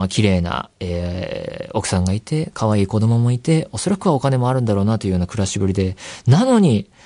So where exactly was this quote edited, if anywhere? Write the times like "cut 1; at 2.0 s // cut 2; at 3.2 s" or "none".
none